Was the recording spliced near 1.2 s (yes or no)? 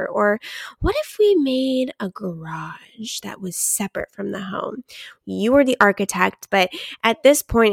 no